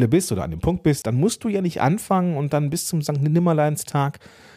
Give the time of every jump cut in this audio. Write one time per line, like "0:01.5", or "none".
0:01.0